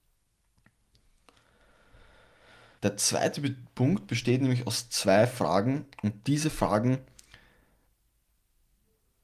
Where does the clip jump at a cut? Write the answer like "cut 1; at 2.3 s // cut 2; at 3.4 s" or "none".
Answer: cut 1; at 2.8 s